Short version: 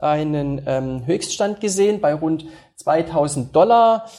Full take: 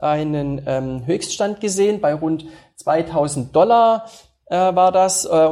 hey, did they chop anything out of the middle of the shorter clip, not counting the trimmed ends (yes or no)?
no